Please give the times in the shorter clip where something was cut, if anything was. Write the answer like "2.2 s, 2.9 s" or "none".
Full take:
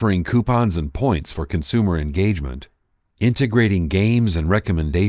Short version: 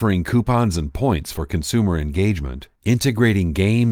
2.8 s